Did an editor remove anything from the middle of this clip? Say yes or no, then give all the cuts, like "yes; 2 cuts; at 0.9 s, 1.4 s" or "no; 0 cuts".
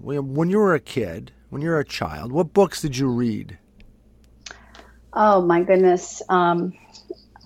no; 0 cuts